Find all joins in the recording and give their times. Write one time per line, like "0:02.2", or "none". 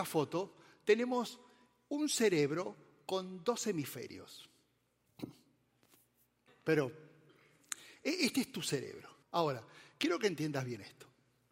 0:06.5
0:09.2